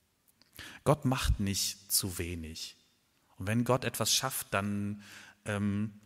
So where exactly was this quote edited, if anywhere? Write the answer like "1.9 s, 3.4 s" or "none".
none